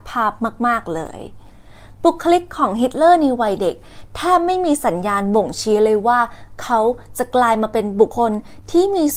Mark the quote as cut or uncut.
cut